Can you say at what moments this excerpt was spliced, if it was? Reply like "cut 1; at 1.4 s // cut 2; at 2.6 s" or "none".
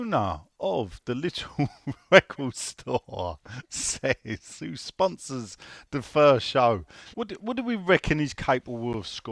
cut 1; at 7.1 s